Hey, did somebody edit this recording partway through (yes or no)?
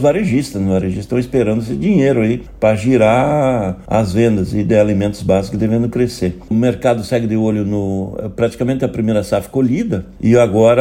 no